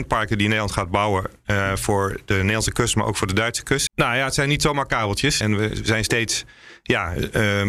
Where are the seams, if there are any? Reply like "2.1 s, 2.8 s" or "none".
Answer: 3.9 s, 5.4 s